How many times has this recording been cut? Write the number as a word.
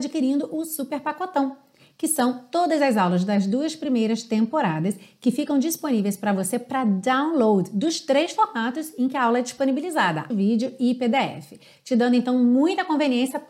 one